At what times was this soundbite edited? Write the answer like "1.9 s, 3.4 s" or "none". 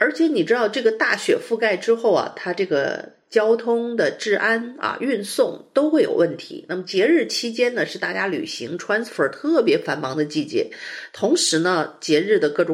none